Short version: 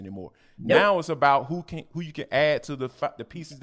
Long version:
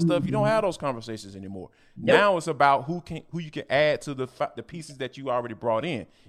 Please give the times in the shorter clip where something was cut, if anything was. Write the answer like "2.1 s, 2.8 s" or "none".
none